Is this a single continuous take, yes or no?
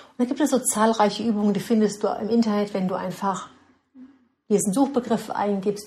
yes